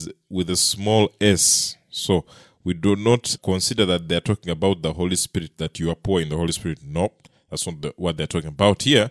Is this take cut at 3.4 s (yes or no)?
yes